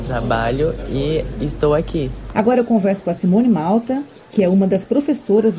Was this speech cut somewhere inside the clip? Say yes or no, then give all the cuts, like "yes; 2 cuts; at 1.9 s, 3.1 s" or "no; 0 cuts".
no; 0 cuts